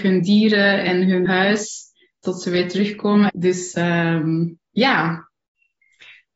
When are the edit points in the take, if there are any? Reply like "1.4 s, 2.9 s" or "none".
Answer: 1.3 s, 3.3 s